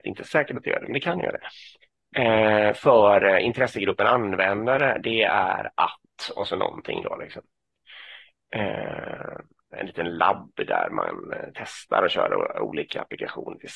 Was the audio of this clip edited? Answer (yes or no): yes